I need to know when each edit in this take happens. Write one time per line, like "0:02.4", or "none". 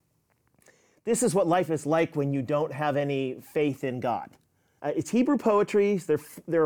0:04.8